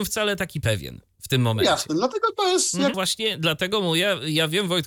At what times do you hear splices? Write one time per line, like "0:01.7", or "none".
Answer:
0:02.9